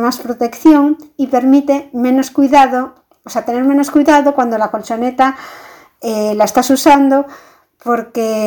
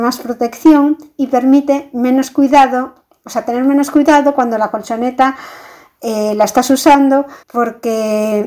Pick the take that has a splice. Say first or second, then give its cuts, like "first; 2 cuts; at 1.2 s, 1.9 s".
second; 1 cut; at 7.4 s